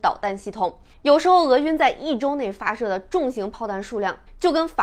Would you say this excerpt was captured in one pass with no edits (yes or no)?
no